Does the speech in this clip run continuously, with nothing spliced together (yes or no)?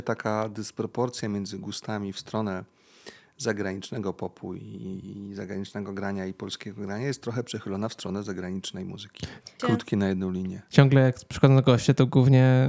no